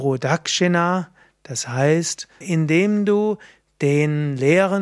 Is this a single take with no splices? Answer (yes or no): no